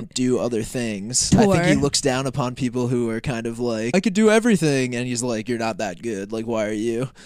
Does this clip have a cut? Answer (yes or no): yes